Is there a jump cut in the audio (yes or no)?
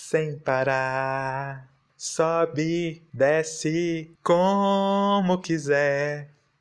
yes